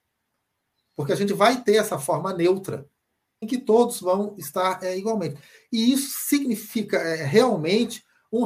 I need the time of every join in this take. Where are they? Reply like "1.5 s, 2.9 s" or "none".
3.4 s